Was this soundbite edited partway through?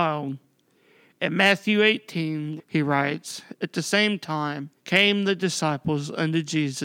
yes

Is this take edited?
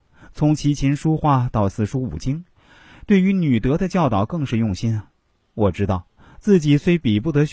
no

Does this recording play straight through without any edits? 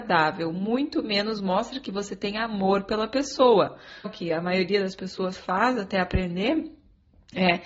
no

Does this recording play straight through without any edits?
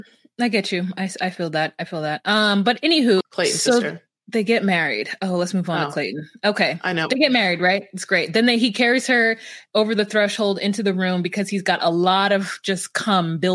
no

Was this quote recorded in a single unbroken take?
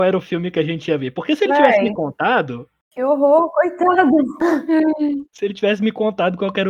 yes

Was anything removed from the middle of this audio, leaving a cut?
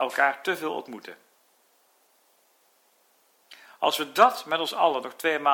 no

